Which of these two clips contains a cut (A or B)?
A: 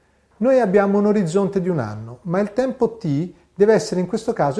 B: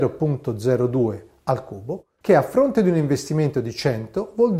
B